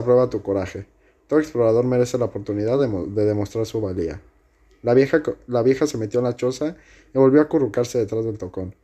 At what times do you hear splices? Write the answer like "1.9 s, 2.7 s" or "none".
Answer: none